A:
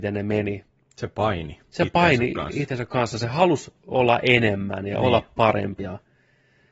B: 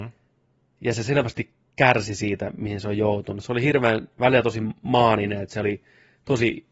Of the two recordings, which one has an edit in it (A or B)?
A